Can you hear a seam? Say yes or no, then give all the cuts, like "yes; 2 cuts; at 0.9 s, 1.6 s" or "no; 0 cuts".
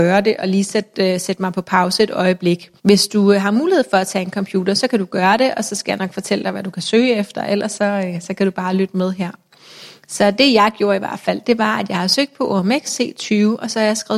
yes; 1 cut; at 2.8 s